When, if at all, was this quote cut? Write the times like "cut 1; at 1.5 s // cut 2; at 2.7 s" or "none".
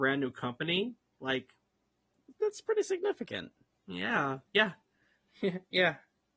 cut 1; at 2.3 s // cut 2; at 4.5 s